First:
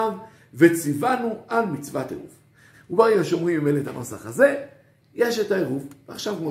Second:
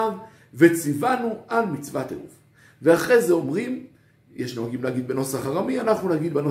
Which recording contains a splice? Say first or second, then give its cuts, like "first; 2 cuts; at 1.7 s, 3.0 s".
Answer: first; 1 cut; at 2.7 s